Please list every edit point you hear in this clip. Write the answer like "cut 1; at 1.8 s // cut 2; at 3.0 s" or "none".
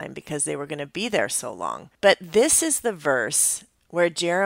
cut 1; at 1.9 s